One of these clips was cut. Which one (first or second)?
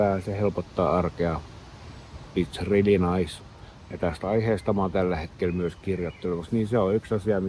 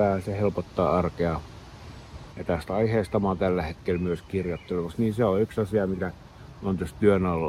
second